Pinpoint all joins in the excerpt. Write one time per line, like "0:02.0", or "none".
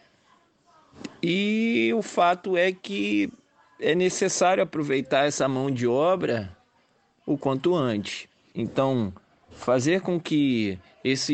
0:08.5